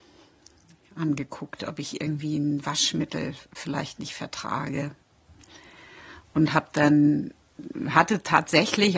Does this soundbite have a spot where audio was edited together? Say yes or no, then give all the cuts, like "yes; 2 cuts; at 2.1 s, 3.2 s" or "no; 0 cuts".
no; 0 cuts